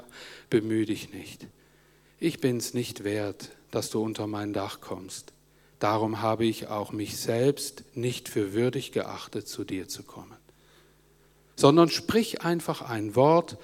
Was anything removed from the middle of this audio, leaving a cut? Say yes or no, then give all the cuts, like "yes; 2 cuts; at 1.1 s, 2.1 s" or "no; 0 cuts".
no; 0 cuts